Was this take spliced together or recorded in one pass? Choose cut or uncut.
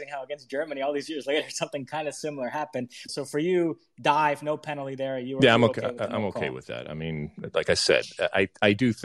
cut